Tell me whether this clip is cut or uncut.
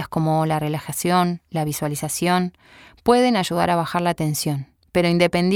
uncut